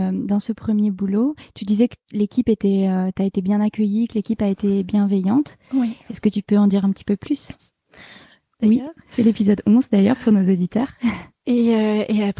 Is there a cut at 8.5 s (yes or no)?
yes